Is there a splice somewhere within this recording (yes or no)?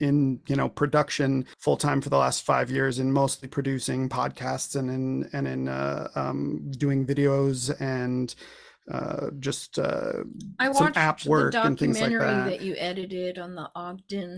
no